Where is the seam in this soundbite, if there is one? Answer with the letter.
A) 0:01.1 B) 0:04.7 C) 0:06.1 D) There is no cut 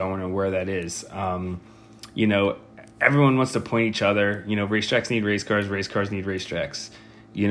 D